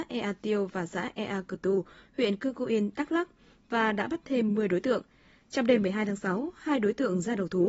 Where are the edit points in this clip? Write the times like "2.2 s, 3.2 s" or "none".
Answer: none